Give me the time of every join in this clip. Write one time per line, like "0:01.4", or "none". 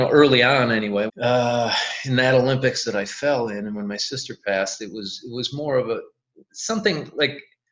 0:01.1